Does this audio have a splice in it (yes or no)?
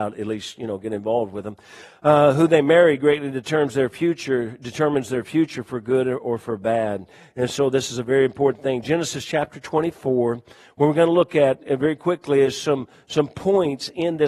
no